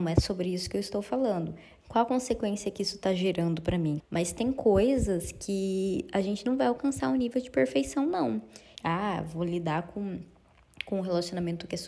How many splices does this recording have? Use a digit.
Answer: 3